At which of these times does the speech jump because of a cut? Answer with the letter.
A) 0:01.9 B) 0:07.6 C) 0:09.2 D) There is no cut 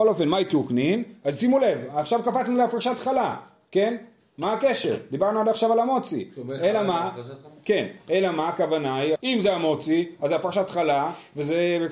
C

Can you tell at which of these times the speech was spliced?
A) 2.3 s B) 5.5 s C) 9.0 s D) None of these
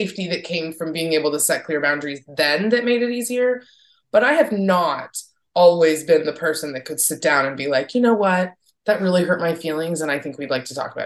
D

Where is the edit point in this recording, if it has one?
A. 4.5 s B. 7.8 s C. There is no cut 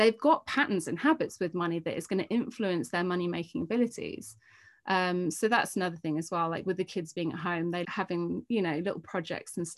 B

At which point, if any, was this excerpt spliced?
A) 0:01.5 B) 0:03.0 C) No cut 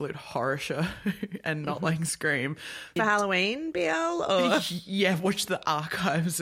B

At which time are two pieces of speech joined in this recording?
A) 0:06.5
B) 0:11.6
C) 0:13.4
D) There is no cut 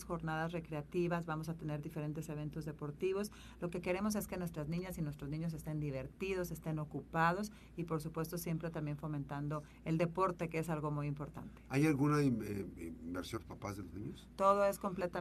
C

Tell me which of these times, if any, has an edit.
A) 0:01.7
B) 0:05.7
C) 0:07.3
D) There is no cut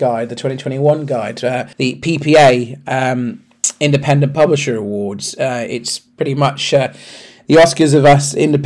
A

